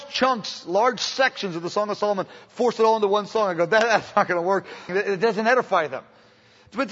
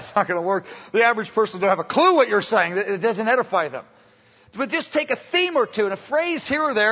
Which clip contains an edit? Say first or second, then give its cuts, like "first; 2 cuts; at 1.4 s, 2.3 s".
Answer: first; 1 cut; at 4.9 s